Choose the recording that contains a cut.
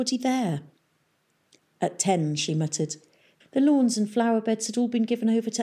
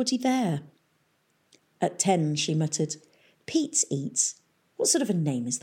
first; 1 cut; at 3.4 s

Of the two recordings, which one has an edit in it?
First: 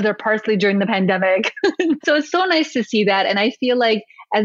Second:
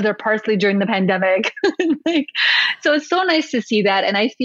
first; 1 cut; at 2.0 s

